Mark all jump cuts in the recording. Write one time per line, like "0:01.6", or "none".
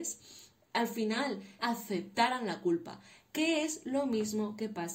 0:01.6